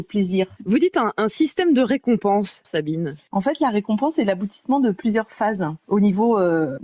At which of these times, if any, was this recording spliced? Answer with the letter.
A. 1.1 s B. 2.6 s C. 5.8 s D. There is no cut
B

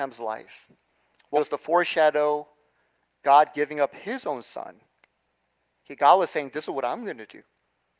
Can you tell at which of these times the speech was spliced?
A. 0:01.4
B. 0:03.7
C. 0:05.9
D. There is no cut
A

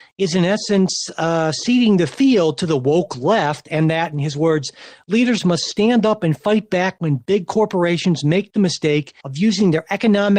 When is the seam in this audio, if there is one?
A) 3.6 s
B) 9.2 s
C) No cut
B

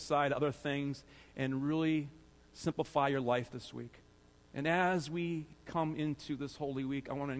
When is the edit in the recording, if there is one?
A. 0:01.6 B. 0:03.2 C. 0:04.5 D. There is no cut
C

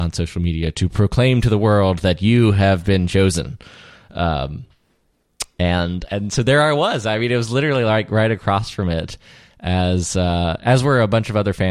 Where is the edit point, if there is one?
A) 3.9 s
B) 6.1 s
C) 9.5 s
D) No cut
B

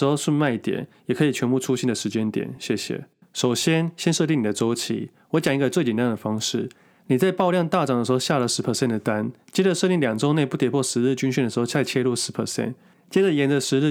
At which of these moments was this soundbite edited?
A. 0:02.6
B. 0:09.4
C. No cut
C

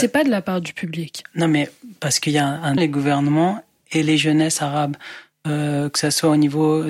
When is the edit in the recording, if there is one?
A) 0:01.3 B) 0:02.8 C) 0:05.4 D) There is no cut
B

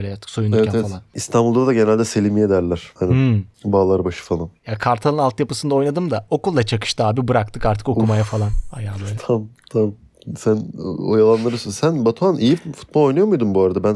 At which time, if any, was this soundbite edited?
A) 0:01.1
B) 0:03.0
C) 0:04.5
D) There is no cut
B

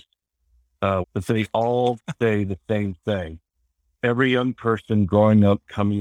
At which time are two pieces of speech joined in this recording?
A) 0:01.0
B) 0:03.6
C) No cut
A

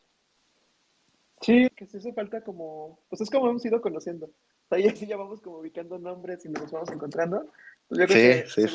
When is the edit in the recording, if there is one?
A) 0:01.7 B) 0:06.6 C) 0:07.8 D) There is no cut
A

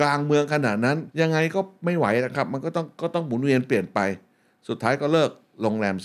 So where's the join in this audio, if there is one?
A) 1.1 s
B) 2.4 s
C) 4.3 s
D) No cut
A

